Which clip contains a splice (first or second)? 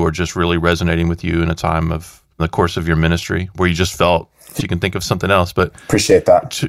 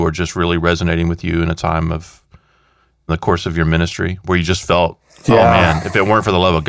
first